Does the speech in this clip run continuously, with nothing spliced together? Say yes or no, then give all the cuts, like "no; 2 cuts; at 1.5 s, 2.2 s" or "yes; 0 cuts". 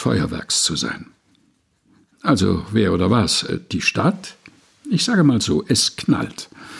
yes; 0 cuts